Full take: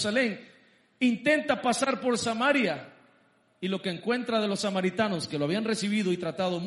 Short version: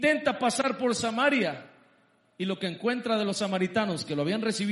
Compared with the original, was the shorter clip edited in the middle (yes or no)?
no